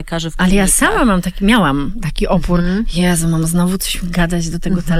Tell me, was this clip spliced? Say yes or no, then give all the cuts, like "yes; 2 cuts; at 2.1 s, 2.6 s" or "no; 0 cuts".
no; 0 cuts